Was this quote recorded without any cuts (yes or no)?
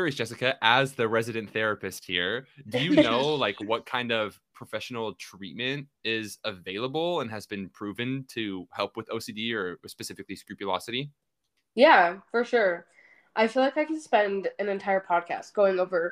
yes